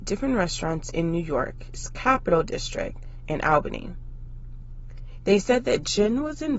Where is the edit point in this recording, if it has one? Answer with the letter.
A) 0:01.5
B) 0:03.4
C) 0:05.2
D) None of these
C